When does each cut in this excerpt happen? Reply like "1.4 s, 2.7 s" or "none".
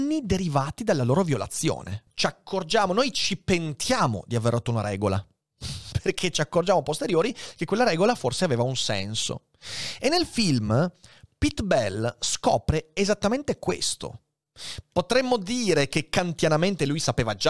2.1 s